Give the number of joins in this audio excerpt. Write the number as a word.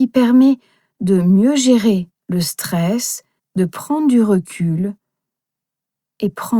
one